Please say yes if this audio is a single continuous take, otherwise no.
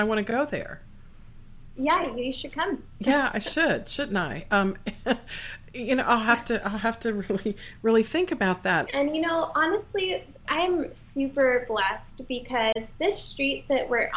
no